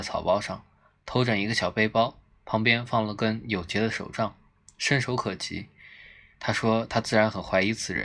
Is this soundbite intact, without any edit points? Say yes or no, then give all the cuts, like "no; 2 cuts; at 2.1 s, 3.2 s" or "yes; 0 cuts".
yes; 0 cuts